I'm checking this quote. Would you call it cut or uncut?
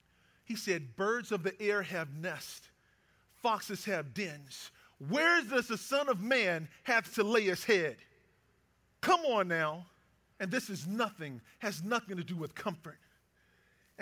cut